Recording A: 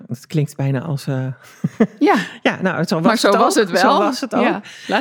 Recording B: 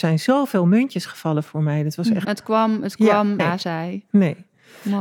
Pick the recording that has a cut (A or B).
B